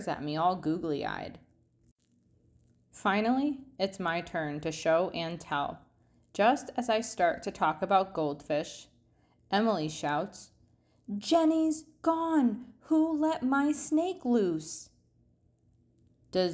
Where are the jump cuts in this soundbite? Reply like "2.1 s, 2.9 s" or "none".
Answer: none

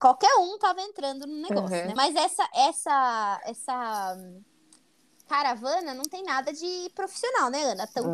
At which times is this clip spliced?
2.0 s

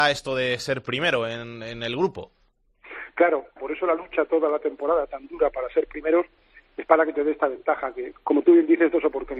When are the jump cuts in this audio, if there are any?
3.6 s, 8.1 s

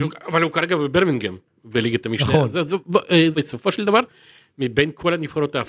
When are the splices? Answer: 3.3 s

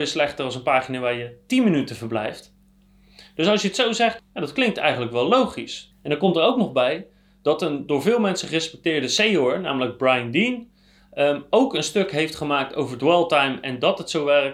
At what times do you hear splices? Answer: 4.2 s, 5.9 s

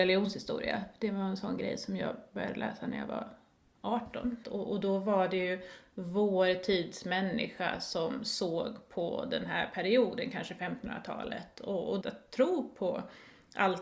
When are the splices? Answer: 4.4 s, 12.0 s

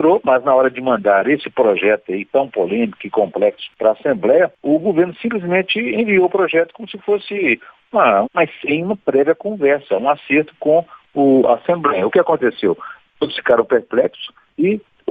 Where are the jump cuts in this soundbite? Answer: 8.2 s

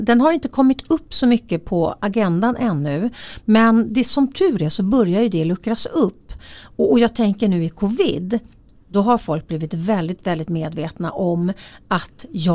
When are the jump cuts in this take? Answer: none

